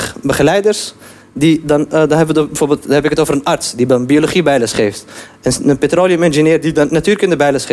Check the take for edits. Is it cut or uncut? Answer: uncut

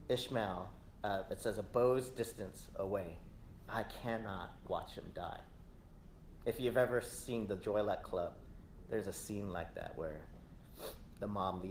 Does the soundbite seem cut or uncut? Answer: cut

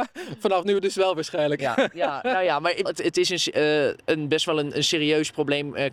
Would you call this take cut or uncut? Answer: cut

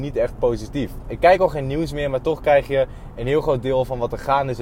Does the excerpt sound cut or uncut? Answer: uncut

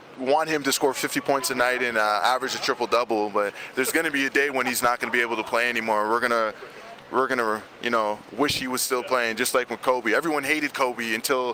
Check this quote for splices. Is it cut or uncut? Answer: uncut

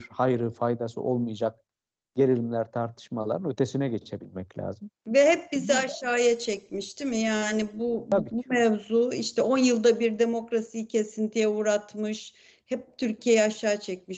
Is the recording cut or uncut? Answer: uncut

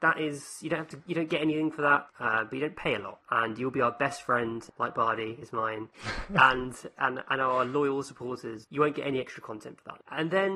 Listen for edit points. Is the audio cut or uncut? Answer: uncut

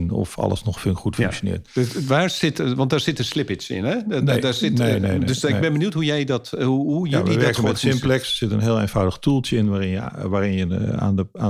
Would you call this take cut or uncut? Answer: uncut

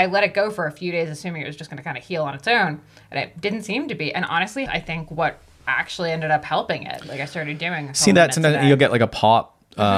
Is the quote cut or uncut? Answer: cut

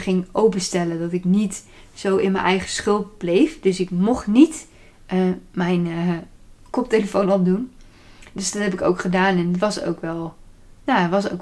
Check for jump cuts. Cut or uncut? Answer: uncut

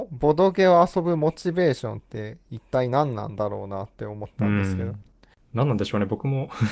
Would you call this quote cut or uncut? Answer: uncut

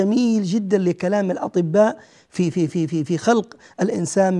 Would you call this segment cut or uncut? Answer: uncut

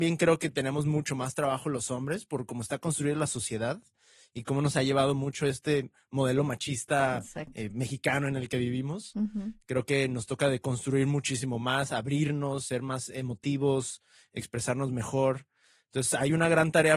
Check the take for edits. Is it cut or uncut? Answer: uncut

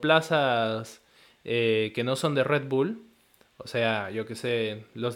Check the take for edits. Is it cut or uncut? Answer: uncut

